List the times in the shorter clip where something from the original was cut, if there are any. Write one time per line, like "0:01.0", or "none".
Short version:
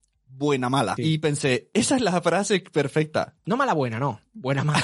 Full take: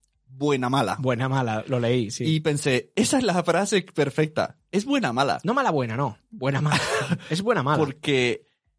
0:01.0
0:03.4